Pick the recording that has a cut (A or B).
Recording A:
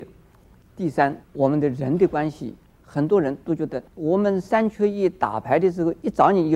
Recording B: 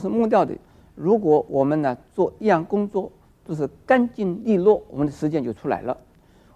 A